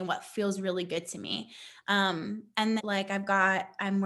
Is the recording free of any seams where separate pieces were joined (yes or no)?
no